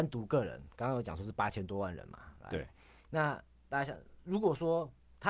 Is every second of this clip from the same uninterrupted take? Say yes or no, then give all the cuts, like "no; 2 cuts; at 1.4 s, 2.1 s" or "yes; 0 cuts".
yes; 0 cuts